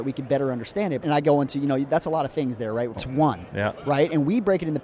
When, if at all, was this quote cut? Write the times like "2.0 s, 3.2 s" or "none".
1.0 s, 3.0 s